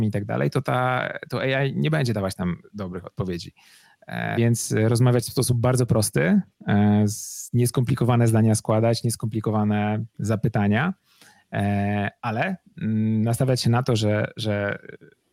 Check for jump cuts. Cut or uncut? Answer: cut